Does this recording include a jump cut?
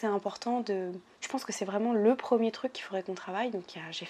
yes; 1 cut; at 1.2 s

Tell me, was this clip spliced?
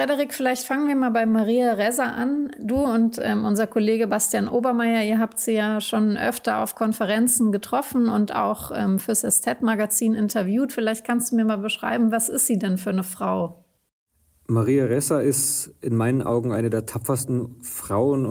no; 0 cuts

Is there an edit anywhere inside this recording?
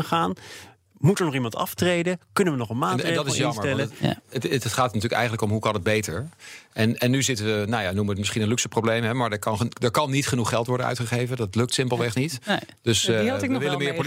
no; 0 cuts

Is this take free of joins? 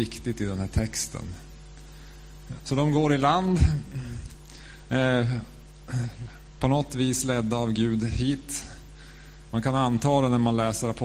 no; 2 cuts; at 2.6 s, 9.5 s

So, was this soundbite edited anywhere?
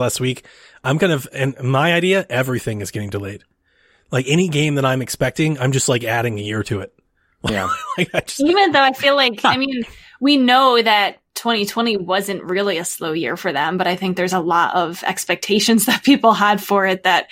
no; 0 cuts

